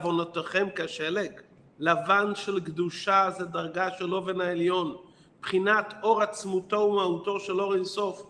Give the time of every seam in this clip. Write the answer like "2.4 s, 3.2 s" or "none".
1.7 s